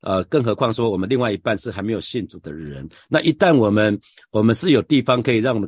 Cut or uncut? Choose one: uncut